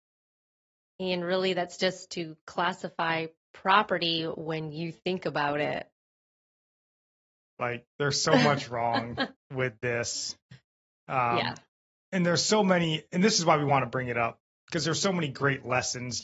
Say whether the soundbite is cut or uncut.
uncut